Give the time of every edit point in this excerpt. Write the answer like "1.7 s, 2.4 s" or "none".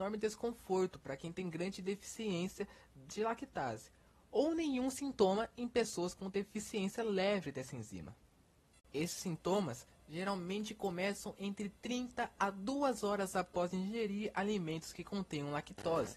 none